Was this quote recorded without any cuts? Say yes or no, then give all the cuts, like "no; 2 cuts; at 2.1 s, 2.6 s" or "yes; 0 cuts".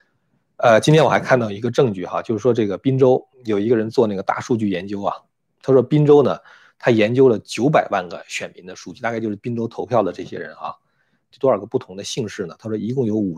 no; 2 cuts; at 3.3 s, 11.3 s